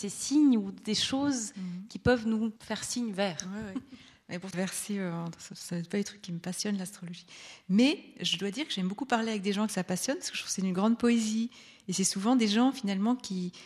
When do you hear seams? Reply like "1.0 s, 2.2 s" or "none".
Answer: 2.6 s, 4.5 s